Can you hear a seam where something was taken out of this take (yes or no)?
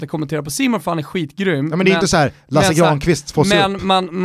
no